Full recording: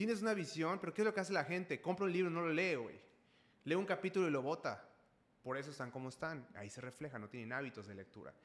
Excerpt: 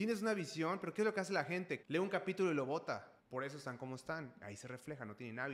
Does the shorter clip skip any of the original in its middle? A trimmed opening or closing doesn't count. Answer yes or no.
yes